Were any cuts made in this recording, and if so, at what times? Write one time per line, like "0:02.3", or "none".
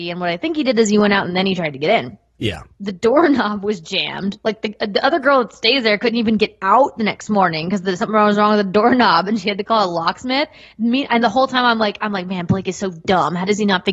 0:02.7